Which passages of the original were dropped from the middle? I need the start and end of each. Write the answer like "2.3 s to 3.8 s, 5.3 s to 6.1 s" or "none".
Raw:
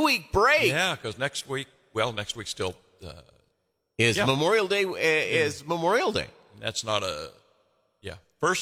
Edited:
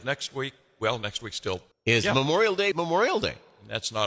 2.9 s to 3.8 s, 4.8 s to 5.6 s